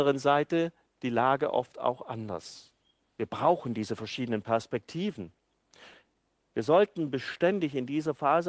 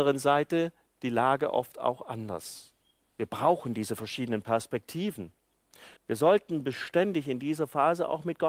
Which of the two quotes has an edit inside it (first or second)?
second